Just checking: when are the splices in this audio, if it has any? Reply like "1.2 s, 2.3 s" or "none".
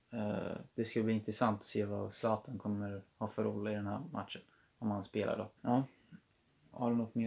5.6 s